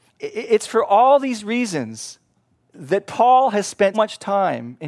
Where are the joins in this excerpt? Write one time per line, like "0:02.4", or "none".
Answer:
0:02.6
0:03.9